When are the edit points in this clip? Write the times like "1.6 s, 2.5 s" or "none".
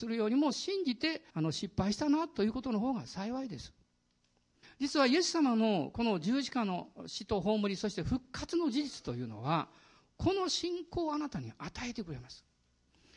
1.3 s, 4.6 s